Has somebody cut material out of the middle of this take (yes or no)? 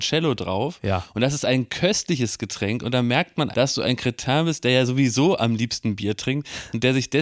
yes